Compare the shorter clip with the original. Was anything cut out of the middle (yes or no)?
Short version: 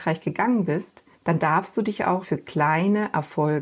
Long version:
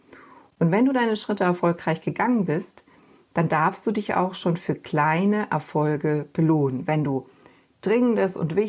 yes